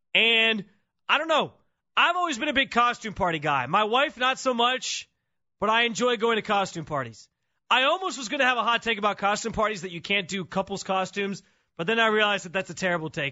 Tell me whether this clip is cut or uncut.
uncut